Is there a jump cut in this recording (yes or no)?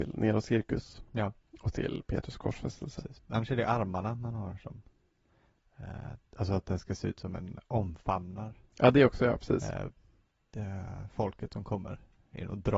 no